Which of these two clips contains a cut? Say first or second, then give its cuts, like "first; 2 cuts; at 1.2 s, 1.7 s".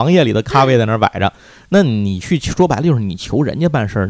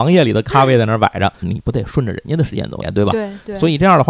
second; 2 cuts; at 1.4 s, 2.8 s